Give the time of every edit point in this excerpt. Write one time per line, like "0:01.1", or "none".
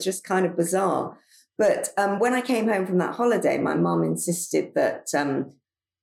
none